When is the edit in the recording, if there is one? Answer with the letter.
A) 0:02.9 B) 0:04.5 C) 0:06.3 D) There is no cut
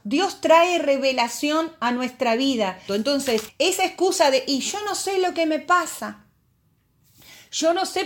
A